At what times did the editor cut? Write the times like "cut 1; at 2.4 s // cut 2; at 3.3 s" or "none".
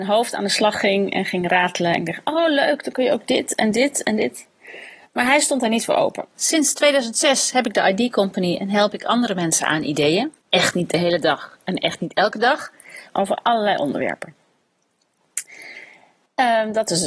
cut 1; at 6.3 s // cut 2; at 10.4 s // cut 3; at 13.1 s

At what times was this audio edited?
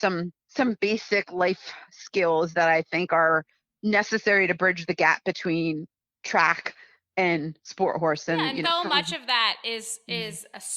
cut 1; at 8.6 s

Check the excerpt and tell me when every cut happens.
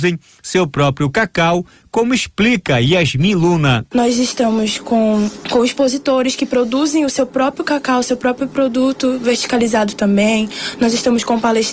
none

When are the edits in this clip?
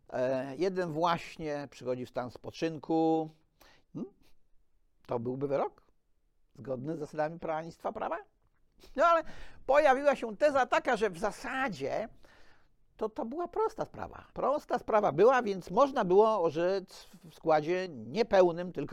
cut 1; at 3.8 s // cut 2; at 14.3 s

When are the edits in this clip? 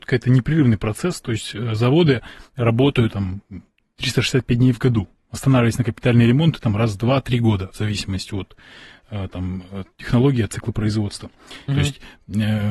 cut 1; at 3.1 s // cut 2; at 11.7 s

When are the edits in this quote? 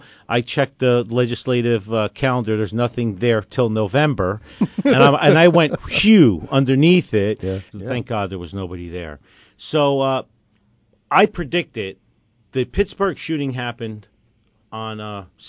cut 1; at 7.7 s

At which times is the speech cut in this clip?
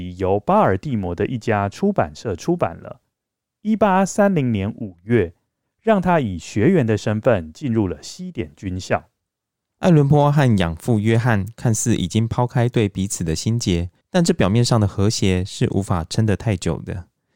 cut 1; at 5.6 s // cut 2; at 14.0 s

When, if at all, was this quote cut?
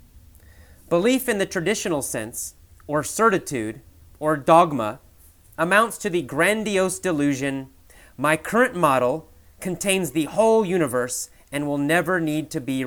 none

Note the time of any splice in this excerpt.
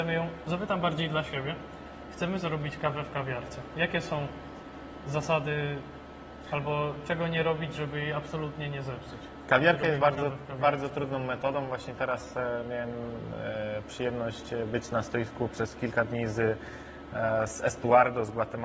none

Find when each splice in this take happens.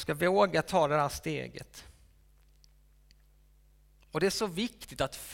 none

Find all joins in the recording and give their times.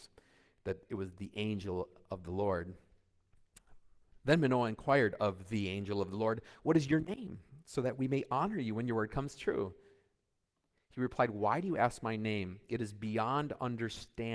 none

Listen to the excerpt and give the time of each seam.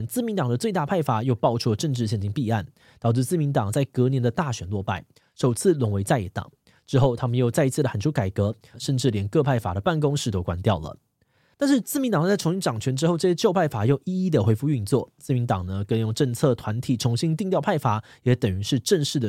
cut 1; at 8.7 s

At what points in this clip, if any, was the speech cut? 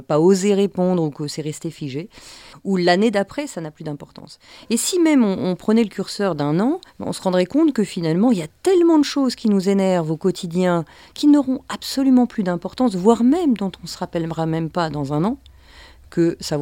cut 1; at 2.5 s // cut 2; at 6.9 s

